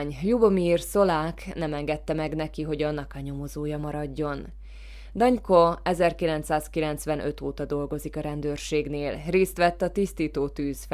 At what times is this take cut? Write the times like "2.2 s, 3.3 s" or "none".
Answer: none

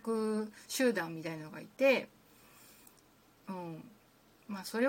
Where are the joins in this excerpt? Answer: none

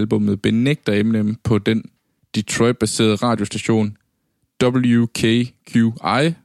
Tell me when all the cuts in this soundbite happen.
none

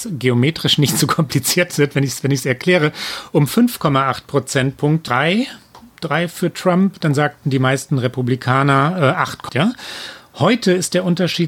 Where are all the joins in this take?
5.1 s, 9.5 s

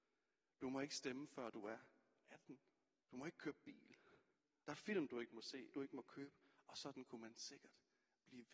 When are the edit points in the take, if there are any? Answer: 3.0 s, 4.6 s, 5.7 s

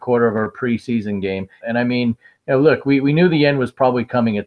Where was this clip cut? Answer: 1.6 s

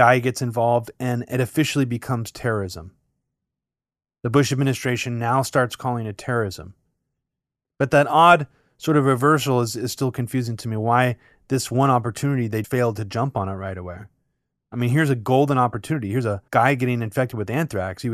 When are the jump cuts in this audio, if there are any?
12.6 s, 16.5 s

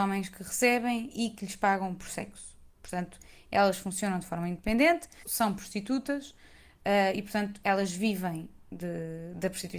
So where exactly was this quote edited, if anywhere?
5.2 s

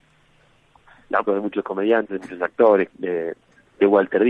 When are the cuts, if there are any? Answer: 1.3 s, 2.9 s

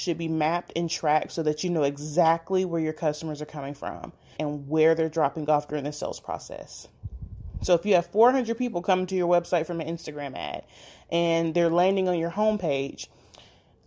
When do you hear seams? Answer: 4.4 s

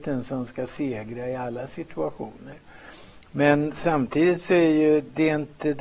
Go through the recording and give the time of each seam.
none

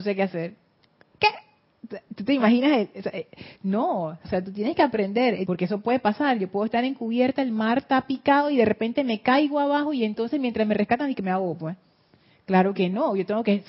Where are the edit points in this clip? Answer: 4.2 s, 5.4 s

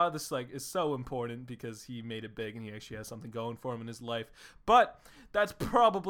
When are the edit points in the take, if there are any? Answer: none

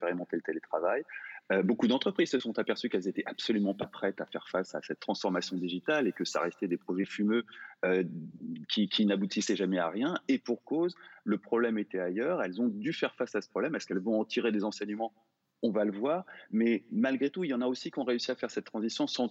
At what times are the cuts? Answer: none

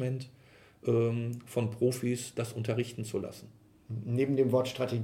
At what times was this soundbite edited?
none

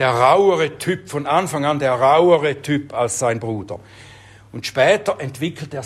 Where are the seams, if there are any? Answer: none

